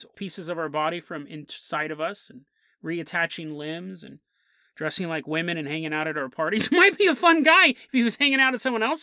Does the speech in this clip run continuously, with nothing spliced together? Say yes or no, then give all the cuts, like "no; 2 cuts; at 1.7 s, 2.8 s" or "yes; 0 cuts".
yes; 0 cuts